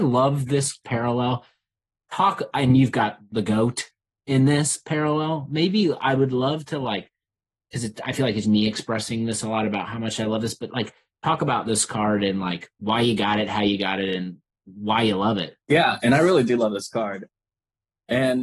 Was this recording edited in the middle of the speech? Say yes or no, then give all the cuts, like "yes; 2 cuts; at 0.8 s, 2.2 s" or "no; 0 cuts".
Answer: yes; 1 cut; at 8.4 s